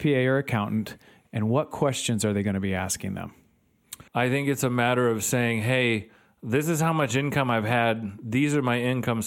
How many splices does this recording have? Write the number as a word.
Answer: one